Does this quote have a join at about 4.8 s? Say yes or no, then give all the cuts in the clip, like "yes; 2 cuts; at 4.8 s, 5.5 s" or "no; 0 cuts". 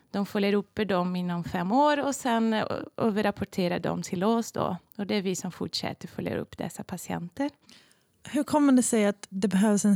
no; 0 cuts